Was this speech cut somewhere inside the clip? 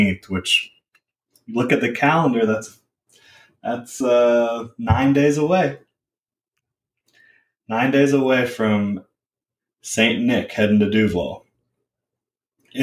no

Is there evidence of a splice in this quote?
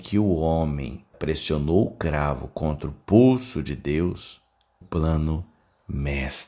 yes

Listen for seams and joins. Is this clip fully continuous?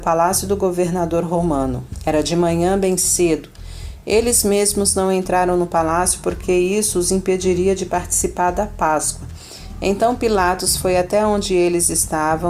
yes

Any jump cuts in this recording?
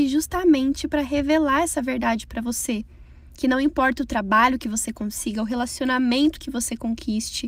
no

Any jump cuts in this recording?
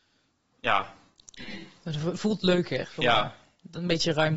yes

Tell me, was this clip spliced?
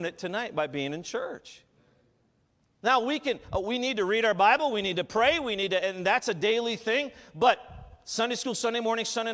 no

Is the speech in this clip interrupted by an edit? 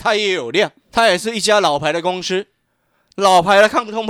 no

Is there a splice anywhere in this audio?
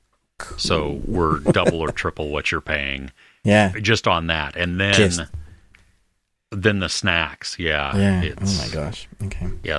yes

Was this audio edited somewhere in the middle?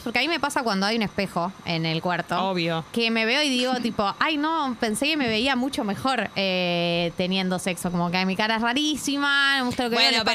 no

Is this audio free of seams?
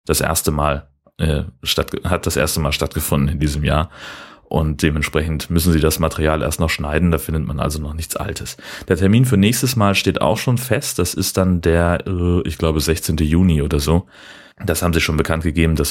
yes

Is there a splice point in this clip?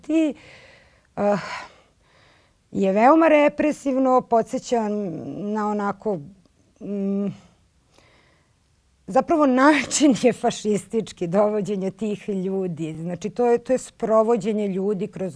no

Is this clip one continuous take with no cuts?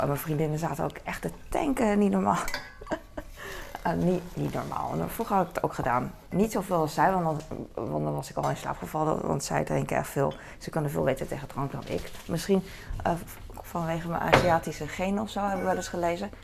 yes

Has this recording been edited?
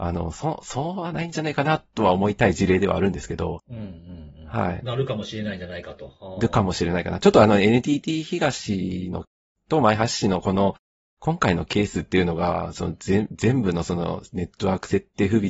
yes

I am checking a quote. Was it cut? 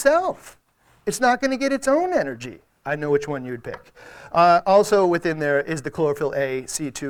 no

